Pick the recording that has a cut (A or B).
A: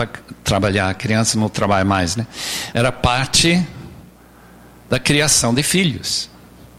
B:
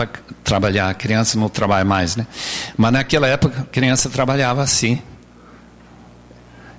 A